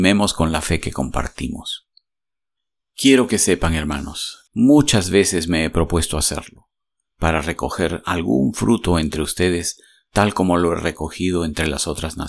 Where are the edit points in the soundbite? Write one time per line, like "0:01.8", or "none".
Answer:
0:04.4